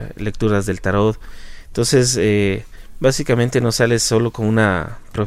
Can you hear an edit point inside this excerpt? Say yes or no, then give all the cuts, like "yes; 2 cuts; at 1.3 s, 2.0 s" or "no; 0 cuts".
no; 0 cuts